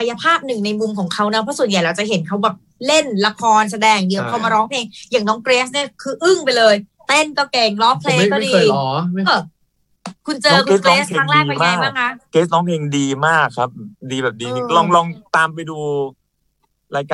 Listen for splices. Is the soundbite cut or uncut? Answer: cut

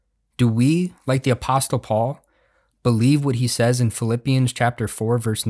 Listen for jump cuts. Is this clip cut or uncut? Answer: uncut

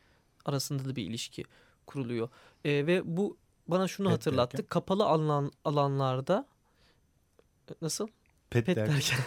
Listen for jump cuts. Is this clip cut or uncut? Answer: uncut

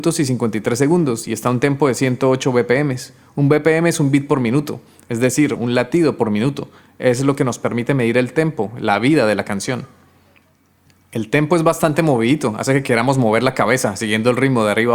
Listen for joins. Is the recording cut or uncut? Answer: cut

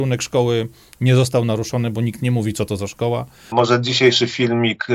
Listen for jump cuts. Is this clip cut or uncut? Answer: cut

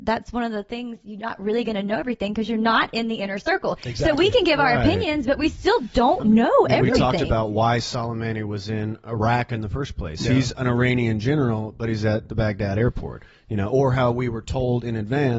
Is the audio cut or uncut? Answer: uncut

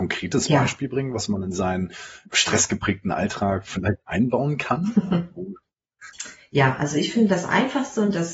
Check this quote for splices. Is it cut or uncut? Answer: cut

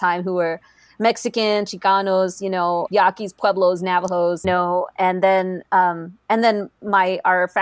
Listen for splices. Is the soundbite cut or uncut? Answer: cut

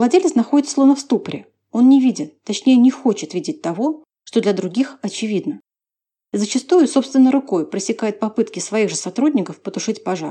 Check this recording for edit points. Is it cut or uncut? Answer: uncut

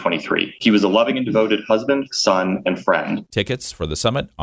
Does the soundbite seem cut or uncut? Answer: cut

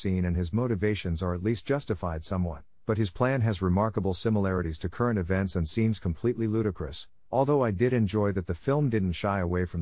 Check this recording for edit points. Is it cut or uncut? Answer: uncut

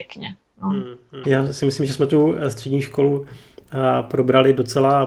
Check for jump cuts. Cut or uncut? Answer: cut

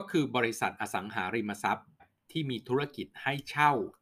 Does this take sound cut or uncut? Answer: cut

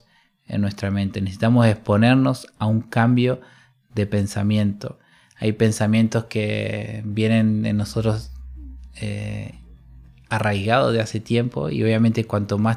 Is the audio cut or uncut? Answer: uncut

